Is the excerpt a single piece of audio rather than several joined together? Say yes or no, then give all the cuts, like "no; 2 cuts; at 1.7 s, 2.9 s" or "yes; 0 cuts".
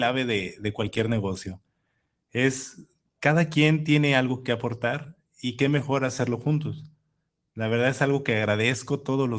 yes; 0 cuts